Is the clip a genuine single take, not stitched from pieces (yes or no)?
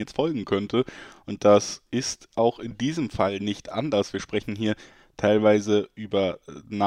yes